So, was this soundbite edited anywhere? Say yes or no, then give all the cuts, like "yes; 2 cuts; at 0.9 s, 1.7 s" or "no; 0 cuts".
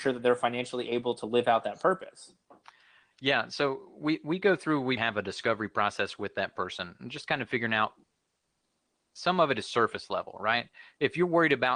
yes; 1 cut; at 5.0 s